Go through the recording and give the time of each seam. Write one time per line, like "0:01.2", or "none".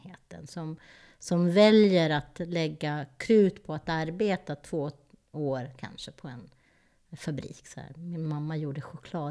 none